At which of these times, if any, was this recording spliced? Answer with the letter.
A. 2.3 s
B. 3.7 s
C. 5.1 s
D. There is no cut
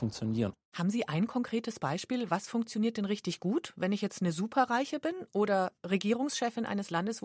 D